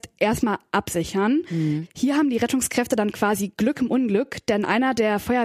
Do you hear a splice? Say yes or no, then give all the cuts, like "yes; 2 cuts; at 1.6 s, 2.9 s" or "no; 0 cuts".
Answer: no; 0 cuts